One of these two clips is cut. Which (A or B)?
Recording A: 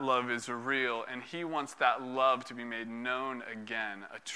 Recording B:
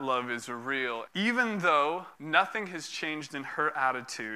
B